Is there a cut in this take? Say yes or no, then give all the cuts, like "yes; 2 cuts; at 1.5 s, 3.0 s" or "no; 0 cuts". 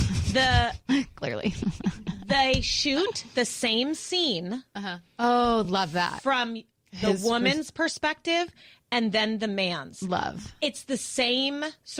no; 0 cuts